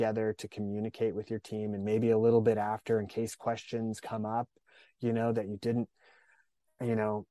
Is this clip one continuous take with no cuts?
yes; 0 cuts

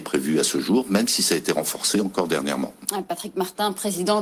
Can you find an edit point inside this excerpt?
no; 0 cuts

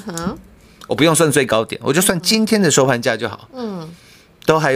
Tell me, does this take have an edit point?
no; 0 cuts

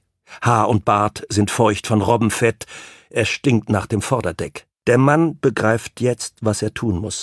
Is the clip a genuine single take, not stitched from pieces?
no; 1 cut; at 4.8 s

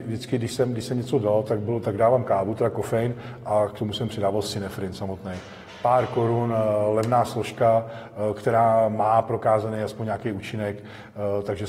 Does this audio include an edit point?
no; 0 cuts

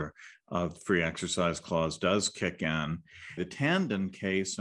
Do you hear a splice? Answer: yes; 1 cut; at 3.4 s

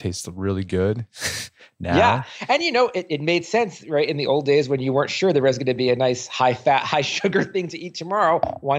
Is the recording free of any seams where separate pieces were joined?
yes; 0 cuts

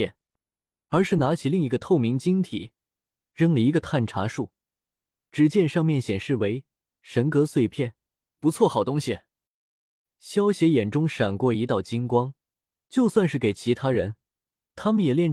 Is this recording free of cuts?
no; 2 cuts; at 8.3 s, 12.9 s

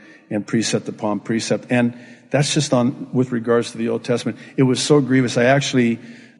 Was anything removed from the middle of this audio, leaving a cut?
no; 0 cuts

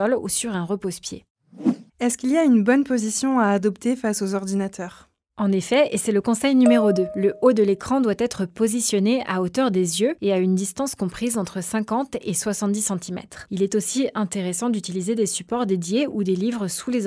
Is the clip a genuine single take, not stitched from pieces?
no; 2 cuts; at 1.9 s, 13.4 s

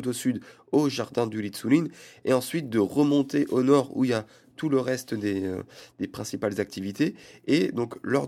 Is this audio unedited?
yes; 0 cuts

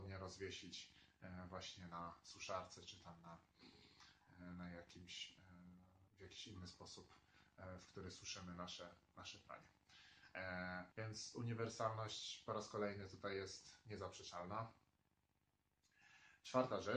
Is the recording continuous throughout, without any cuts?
no; 2 cuts; at 6.1 s, 10.9 s

